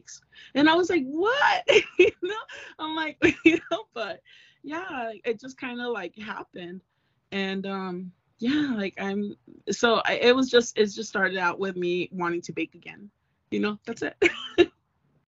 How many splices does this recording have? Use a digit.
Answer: 2